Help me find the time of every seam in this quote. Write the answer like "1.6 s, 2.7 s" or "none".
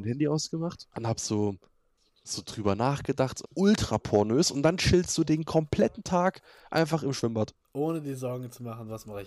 0.9 s, 3.4 s